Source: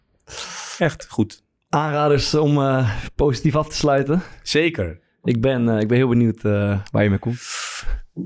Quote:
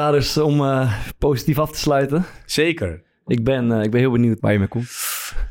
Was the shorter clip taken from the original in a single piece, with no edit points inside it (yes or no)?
no